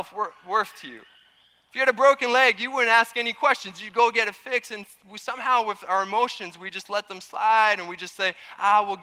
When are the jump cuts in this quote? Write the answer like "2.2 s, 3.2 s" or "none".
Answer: none